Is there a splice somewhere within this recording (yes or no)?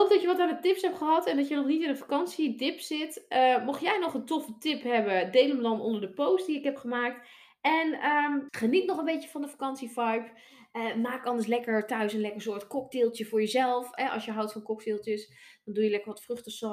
yes